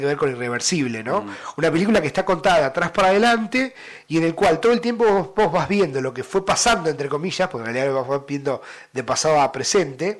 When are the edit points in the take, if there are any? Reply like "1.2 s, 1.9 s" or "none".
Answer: none